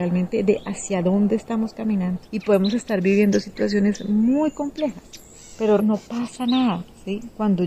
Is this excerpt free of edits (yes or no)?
no